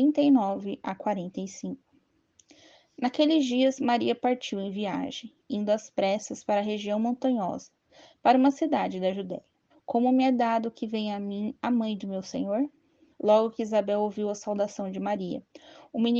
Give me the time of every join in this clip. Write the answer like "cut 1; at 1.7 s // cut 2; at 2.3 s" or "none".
cut 1; at 9.7 s // cut 2; at 13.1 s